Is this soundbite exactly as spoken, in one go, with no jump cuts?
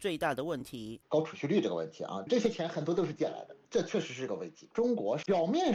no; 1 cut; at 1.0 s

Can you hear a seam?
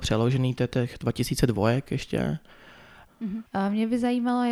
yes; 1 cut; at 3.1 s

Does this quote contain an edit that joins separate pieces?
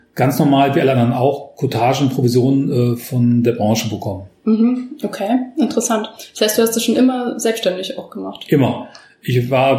yes; 1 cut; at 4.4 s

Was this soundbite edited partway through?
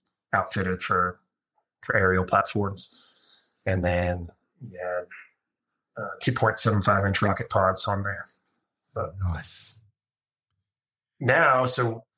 no; 0 cuts

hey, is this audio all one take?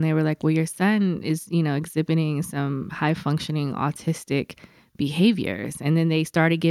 yes; 0 cuts

